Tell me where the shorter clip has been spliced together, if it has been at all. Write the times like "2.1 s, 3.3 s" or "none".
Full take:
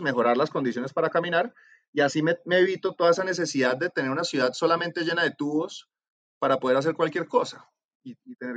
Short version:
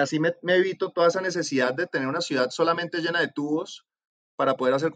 none